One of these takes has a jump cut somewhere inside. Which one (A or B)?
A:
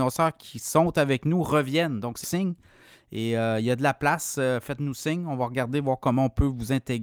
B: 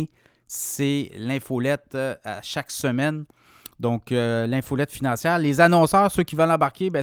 A